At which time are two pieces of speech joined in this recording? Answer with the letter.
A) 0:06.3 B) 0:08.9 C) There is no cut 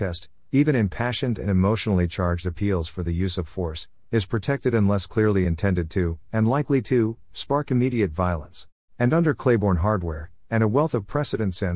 B